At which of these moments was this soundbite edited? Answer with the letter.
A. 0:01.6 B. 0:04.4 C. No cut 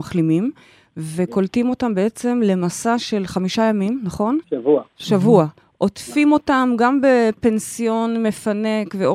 B